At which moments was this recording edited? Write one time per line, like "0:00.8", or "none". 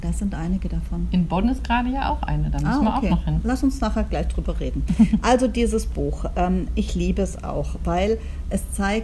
none